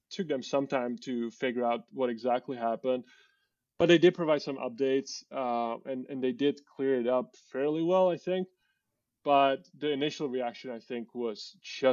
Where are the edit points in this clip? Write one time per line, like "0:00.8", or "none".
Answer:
none